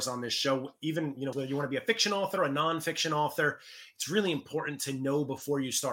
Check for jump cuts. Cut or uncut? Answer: cut